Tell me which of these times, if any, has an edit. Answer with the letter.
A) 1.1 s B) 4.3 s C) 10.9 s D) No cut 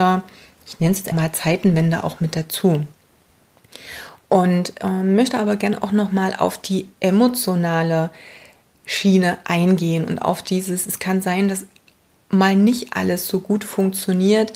A